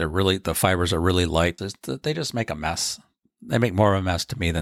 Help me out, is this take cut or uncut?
cut